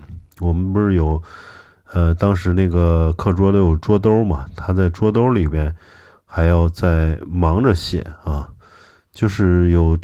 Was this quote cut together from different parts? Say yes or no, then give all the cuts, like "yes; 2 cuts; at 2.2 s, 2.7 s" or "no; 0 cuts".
no; 0 cuts